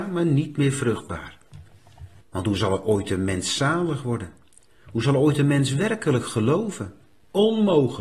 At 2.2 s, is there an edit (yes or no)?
yes